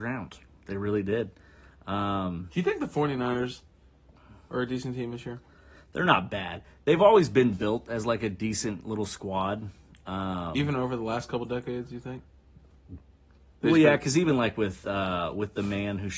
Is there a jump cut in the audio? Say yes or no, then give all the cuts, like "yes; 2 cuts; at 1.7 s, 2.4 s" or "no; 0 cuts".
no; 0 cuts